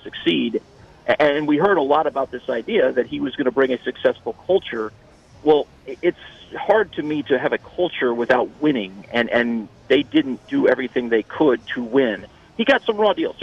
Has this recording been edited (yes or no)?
no